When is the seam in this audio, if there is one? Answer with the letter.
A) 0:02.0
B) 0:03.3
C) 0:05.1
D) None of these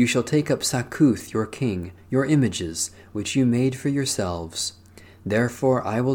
A